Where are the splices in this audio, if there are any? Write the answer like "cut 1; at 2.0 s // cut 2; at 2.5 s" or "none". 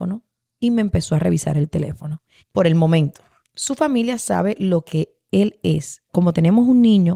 cut 1; at 2.4 s // cut 2; at 6.1 s